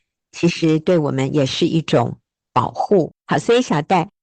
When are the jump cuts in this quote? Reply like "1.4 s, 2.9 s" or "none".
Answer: 3.2 s

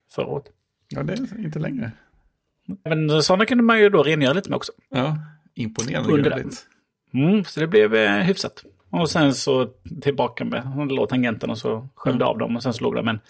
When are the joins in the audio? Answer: 2.9 s

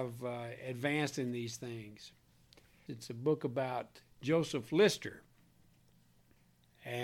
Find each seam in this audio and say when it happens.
2.9 s, 4.1 s

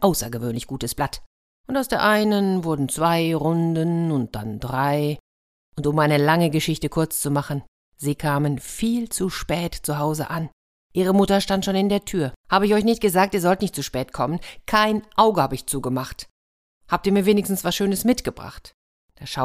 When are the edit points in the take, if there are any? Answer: 12.4 s

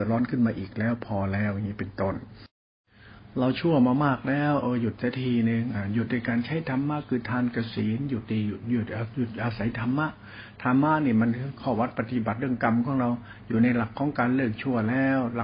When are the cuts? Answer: none

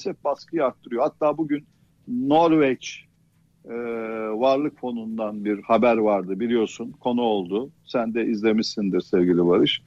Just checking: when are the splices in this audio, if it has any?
none

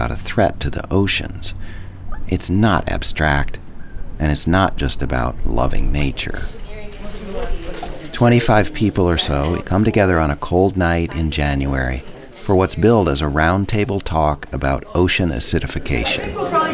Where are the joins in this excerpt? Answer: 8.1 s, 9.6 s

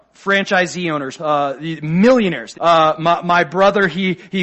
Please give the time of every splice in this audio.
1.2 s, 2.5 s

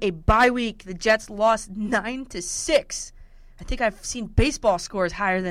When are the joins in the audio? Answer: none

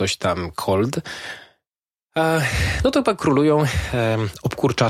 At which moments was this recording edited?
none

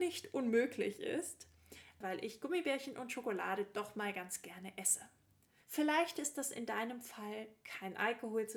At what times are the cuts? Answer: 2.0 s, 5.6 s

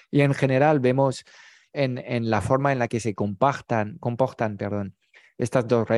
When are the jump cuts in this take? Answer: 2.0 s

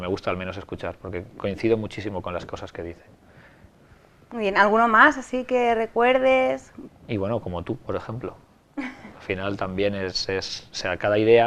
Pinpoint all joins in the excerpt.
6.9 s

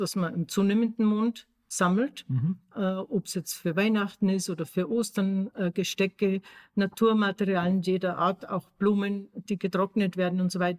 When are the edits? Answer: none

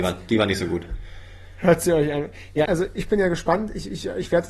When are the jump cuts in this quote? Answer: 2.7 s

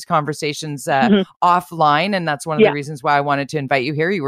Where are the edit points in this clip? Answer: none

